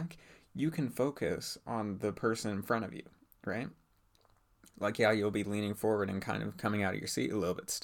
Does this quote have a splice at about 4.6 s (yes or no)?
no